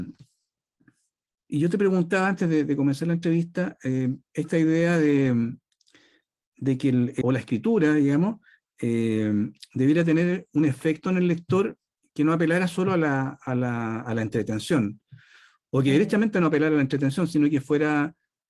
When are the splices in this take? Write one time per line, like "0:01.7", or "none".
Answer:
0:01.4
0:04.2
0:07.2